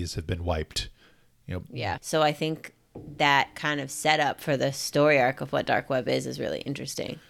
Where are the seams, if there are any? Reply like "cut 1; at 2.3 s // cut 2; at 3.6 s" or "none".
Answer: cut 1; at 2.0 s